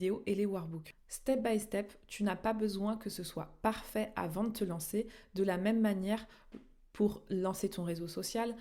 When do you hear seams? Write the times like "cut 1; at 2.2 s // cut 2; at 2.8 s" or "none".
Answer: none